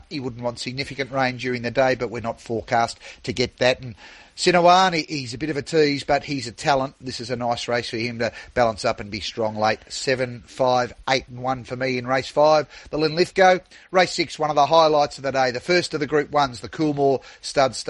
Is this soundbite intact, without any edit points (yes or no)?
yes